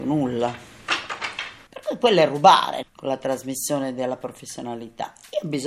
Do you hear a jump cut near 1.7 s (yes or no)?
yes